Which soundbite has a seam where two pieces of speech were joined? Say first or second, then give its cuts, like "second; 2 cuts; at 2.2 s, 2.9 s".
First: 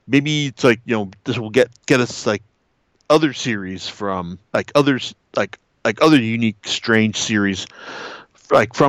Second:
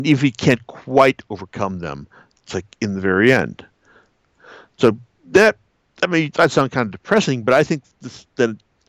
first; 1 cut; at 4.5 s